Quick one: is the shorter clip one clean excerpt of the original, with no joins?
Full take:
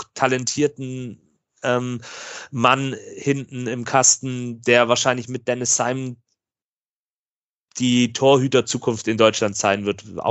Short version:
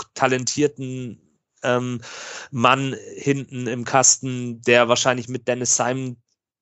yes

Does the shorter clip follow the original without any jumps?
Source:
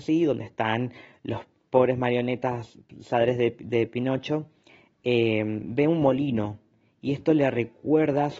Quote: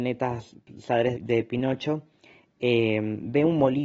no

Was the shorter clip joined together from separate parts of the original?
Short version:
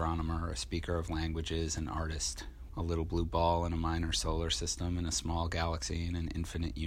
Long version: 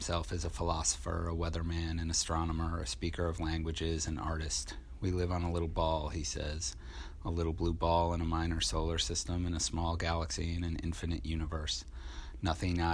yes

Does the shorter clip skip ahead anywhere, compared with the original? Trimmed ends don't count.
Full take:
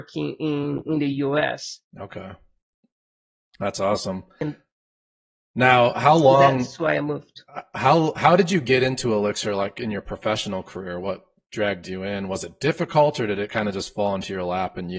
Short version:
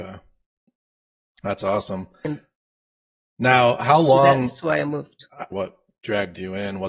yes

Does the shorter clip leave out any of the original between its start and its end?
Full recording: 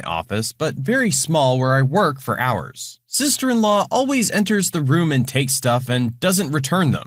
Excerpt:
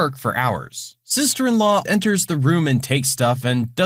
yes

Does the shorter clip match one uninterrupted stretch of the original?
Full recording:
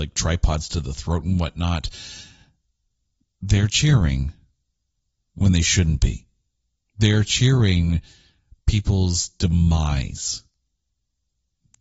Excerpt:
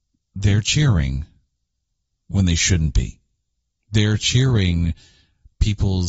yes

